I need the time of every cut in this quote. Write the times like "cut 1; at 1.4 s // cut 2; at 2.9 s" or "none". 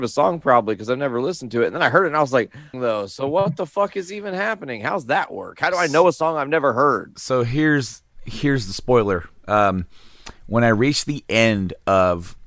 cut 1; at 2.7 s